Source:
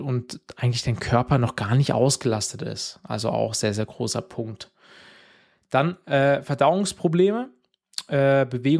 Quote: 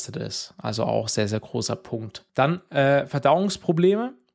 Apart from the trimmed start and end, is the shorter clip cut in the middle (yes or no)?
yes